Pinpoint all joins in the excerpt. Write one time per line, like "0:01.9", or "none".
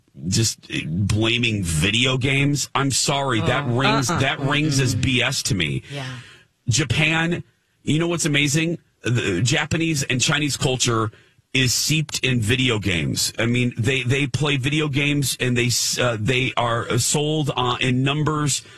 0:04.1